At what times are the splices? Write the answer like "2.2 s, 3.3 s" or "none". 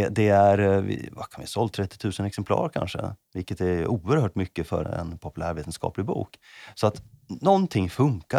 4.8 s